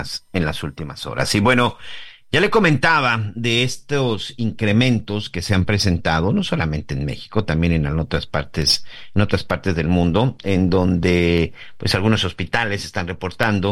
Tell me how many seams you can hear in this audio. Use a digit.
0